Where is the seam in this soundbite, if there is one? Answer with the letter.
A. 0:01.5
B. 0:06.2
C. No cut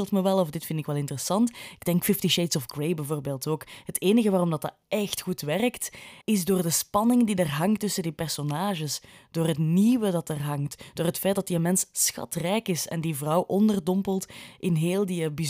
B